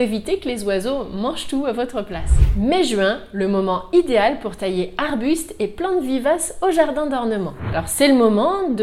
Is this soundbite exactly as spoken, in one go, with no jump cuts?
yes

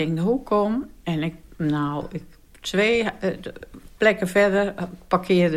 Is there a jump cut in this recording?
no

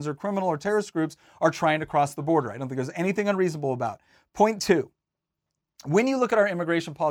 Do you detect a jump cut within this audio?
no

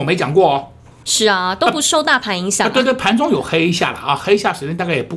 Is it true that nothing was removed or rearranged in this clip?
no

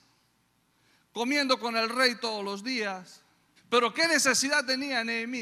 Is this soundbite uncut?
no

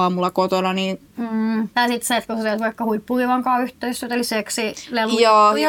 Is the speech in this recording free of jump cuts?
no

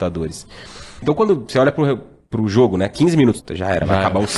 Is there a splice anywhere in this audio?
yes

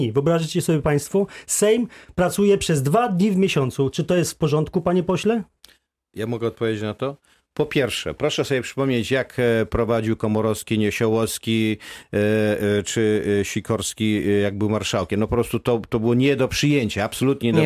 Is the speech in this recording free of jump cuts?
yes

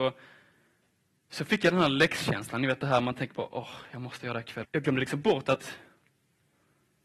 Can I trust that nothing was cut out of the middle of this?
no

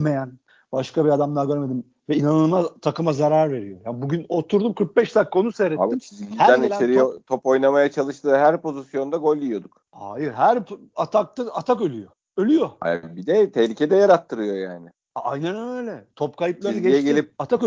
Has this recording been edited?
no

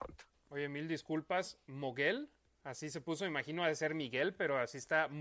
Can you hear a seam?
no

